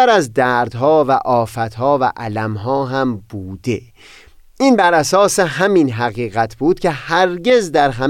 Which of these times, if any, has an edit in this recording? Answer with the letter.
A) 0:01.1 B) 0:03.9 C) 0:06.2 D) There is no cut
D